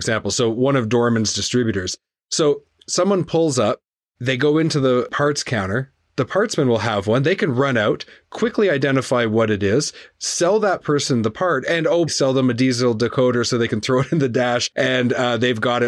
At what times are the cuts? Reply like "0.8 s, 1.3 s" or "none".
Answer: 4.0 s, 12.1 s

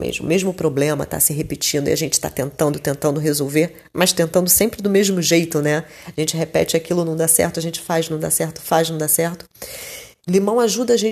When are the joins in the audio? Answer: 10.2 s

